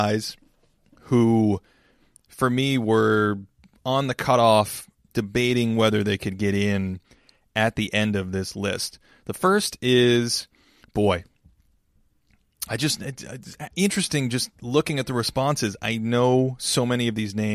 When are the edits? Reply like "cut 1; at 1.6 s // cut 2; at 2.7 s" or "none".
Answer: none